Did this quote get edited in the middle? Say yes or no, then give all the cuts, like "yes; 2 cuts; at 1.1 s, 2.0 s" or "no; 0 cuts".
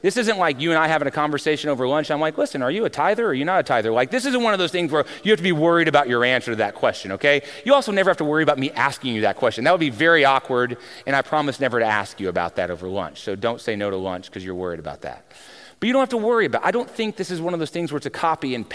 no; 0 cuts